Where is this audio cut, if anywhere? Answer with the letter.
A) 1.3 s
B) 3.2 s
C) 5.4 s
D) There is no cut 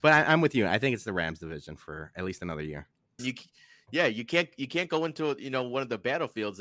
B